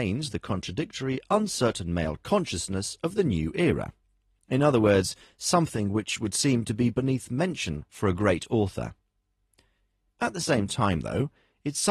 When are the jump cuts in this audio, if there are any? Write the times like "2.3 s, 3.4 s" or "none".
4.4 s